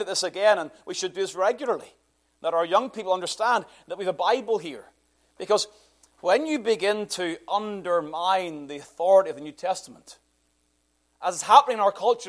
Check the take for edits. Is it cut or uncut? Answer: uncut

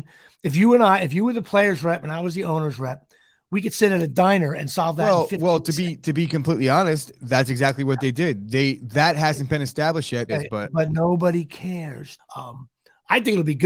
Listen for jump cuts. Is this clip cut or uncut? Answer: cut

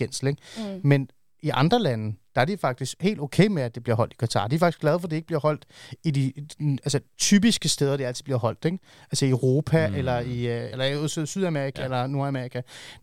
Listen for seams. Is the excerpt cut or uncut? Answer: cut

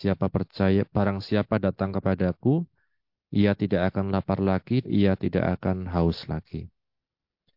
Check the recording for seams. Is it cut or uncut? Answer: cut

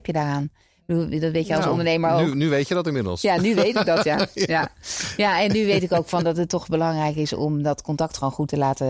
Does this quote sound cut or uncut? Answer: uncut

